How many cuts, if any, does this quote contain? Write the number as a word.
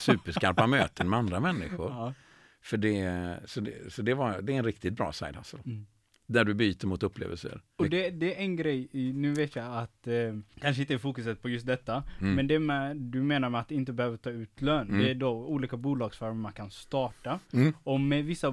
zero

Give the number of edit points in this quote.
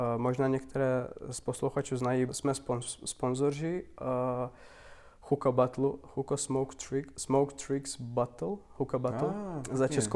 one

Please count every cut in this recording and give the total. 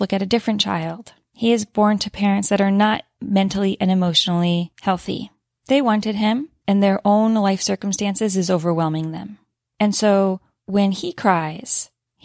one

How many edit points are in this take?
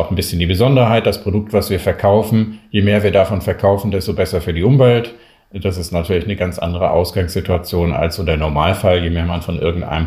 zero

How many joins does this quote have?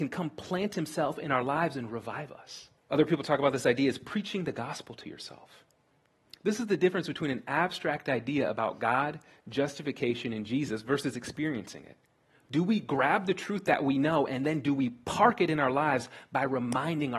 two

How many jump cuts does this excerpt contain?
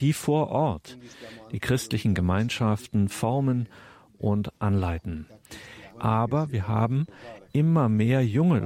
one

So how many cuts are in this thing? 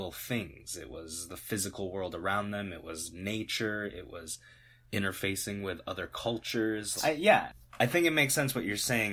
one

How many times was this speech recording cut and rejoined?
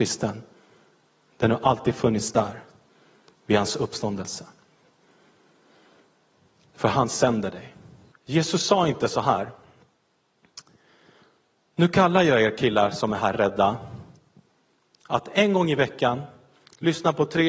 one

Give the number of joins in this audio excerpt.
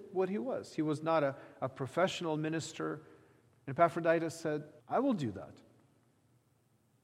two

